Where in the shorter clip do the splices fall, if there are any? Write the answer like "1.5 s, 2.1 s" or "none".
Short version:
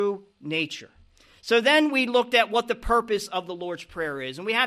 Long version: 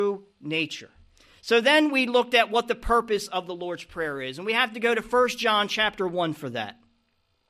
none

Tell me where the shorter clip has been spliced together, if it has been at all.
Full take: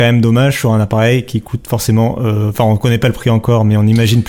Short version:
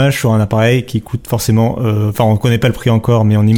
none

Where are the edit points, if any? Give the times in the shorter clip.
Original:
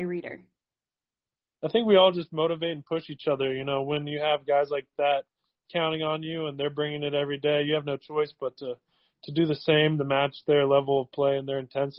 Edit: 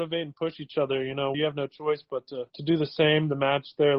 1.3 s, 2.5 s

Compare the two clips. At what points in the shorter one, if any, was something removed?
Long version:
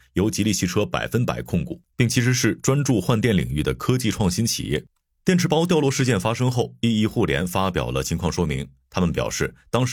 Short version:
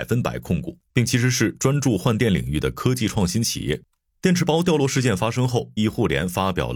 5.8 s

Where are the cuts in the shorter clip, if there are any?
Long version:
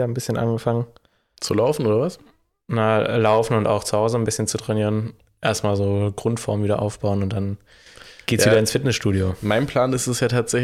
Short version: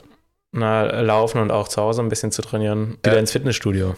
3.0 s

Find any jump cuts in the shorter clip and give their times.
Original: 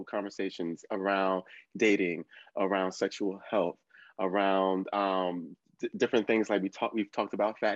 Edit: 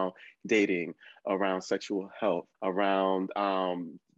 2.5 s

